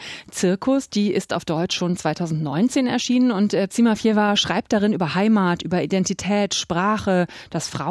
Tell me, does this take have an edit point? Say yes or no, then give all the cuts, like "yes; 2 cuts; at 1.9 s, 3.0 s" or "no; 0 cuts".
no; 0 cuts